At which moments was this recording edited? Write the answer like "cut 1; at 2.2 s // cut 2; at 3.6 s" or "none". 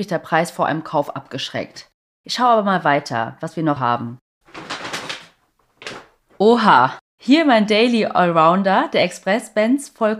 cut 1; at 3.8 s